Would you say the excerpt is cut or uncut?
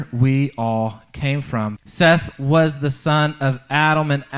cut